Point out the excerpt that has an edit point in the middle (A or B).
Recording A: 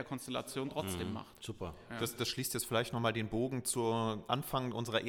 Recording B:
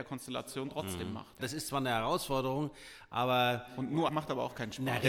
B